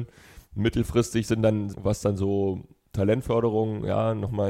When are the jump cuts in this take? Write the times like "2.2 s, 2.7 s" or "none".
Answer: 1.7 s